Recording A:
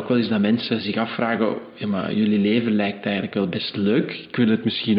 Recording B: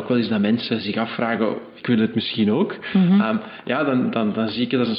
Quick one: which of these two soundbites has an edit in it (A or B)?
B